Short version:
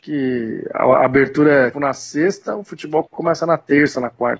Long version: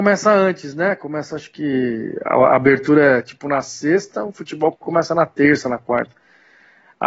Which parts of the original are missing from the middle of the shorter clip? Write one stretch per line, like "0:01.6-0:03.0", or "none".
0:03.2-0:03.4